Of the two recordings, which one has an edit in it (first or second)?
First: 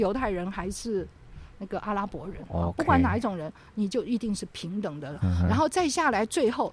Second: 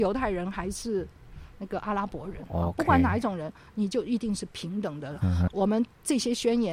second